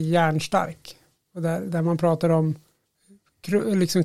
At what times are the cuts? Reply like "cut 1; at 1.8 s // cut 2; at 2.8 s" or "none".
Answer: none

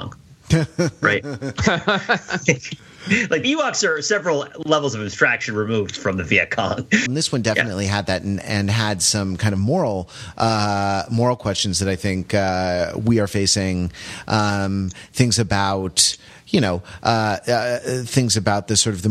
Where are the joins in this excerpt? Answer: cut 1; at 7.1 s

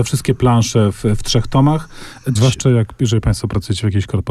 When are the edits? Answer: cut 1; at 2.4 s

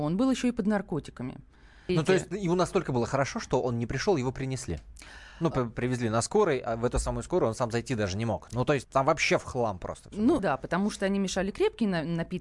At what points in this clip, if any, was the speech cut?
cut 1; at 1.9 s // cut 2; at 8.8 s // cut 3; at 10.4 s

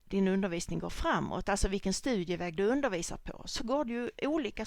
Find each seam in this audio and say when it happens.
none

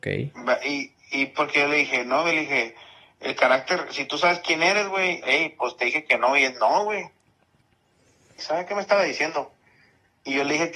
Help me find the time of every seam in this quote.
cut 1; at 5.2 s // cut 2; at 8.4 s

